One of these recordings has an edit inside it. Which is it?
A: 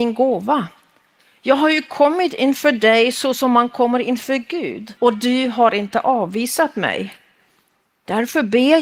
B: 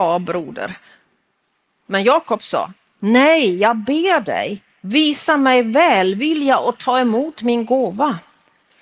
A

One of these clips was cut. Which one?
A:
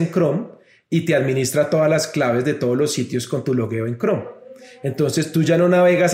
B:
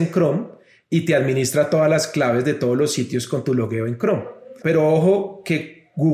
B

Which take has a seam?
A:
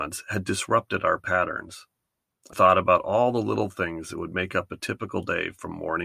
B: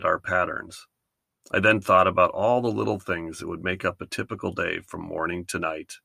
A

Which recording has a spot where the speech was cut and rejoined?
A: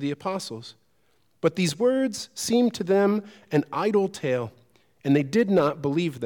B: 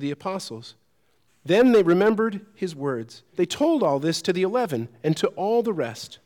B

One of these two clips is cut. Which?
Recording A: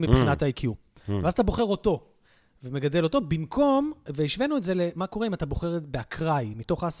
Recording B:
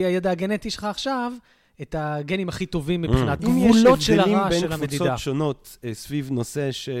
B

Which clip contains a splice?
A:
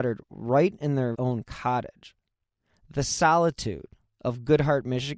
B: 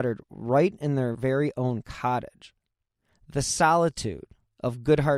A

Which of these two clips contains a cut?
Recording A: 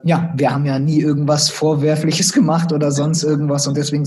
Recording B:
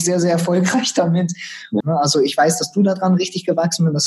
B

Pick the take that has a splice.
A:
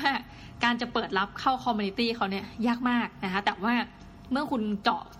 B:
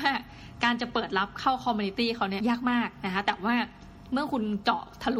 B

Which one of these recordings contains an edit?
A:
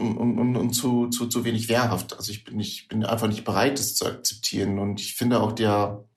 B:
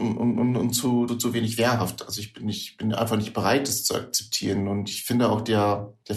B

